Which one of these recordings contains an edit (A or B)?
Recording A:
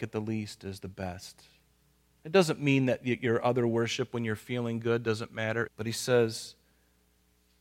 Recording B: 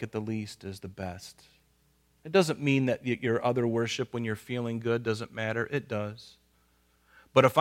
A